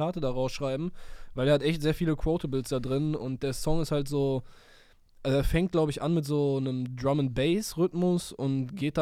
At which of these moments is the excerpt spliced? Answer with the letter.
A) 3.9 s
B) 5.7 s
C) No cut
C